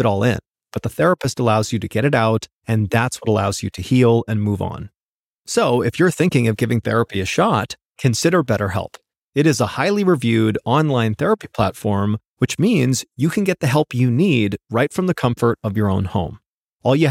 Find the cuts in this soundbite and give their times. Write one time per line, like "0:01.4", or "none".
none